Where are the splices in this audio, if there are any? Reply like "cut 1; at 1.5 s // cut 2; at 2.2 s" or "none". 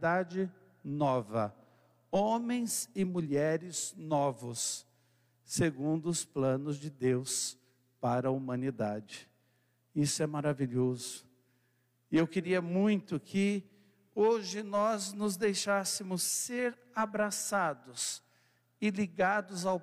none